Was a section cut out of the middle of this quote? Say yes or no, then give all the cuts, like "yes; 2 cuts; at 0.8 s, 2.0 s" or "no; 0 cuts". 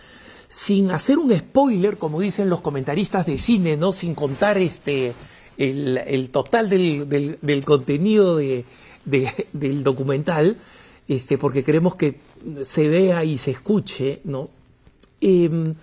no; 0 cuts